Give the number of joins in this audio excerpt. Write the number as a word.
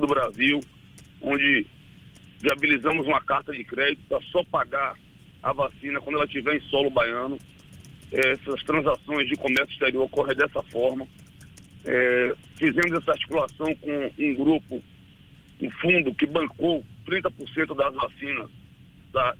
zero